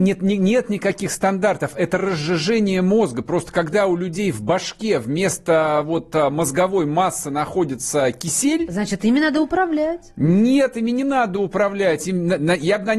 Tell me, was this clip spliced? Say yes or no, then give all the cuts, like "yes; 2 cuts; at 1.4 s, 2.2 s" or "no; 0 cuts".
no; 0 cuts